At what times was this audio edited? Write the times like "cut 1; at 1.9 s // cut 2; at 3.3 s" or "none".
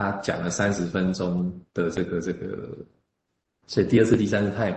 cut 1; at 3.6 s

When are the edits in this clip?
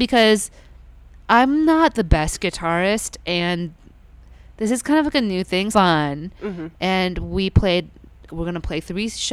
cut 1; at 5.7 s // cut 2; at 8.3 s

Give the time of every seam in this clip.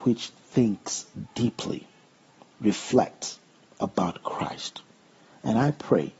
cut 1; at 2.5 s

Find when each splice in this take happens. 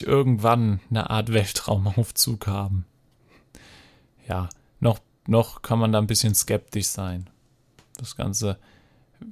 none

